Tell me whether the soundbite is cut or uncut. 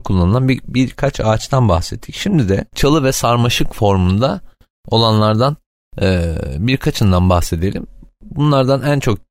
uncut